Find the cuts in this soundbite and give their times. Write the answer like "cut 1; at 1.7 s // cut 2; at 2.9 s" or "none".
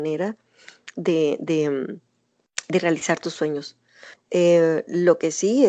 cut 1; at 4.2 s